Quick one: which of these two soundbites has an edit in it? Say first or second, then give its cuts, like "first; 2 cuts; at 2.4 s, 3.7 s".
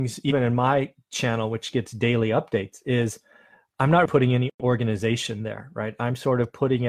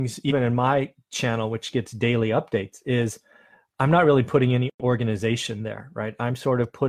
first; 1 cut; at 4.1 s